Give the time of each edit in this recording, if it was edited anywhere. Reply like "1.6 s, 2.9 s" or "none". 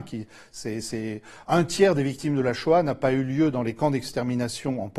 none